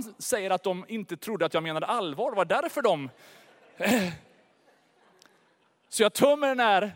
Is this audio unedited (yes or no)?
yes